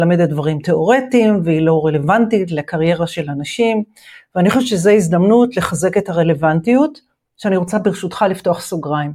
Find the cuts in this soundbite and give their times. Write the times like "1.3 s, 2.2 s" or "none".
none